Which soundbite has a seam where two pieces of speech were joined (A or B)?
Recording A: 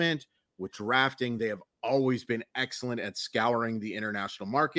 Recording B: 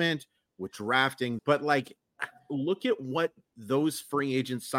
B